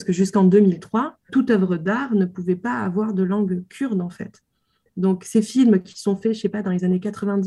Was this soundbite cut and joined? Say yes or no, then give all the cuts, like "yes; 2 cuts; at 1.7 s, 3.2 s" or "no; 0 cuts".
yes; 1 cut; at 1.3 s